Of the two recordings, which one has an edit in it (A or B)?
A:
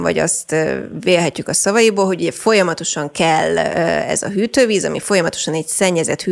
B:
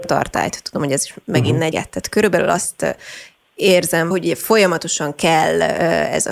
B